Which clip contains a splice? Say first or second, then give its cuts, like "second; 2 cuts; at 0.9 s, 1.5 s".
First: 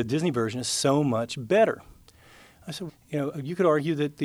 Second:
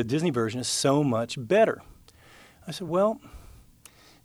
first; 1 cut; at 2.9 s